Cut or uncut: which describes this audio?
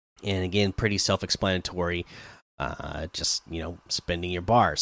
uncut